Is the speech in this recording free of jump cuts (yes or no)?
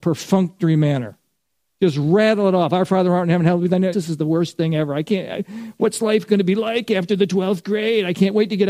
no